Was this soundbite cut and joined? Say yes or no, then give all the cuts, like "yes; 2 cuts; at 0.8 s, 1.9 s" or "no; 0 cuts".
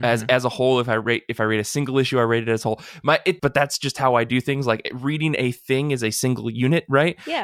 yes; 1 cut; at 3.4 s